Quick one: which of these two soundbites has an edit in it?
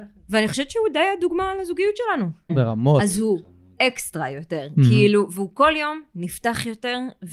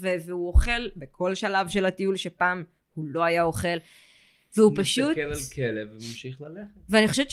first; 1 cut; at 2.5 s

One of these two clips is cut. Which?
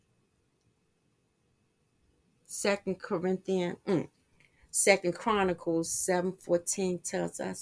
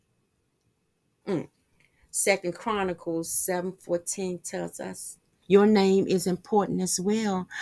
second; 2 cuts; at 1.2 s, 5.4 s

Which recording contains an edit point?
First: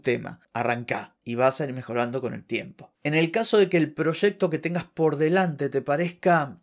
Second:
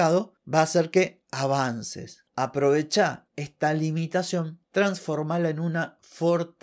second; 1 cut; at 2.3 s

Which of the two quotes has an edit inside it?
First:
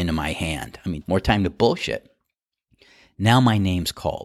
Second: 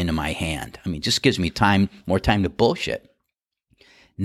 first; 1 cut; at 1.0 s

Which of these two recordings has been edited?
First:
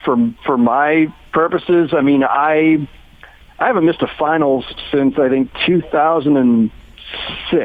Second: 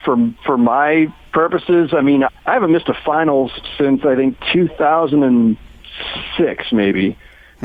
second; 1 cut; at 2.3 s

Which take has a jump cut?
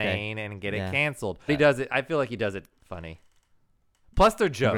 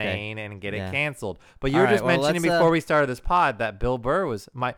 first; 1 cut; at 1.5 s

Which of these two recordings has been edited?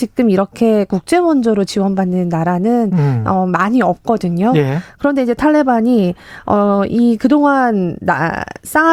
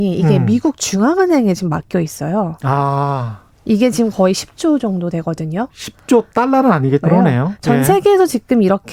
second; 1 cut; at 7.0 s

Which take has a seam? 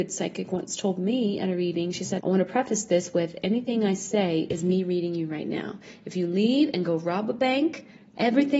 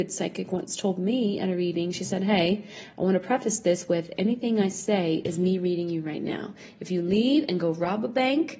first; 1 cut; at 2.2 s

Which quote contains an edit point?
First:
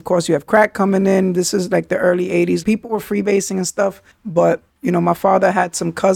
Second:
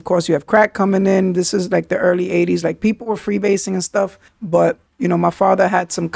first; 1 cut; at 2.6 s

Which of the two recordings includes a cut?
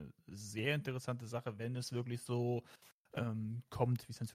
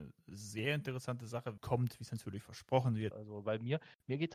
second; 2 cuts; at 1.6 s, 3.1 s

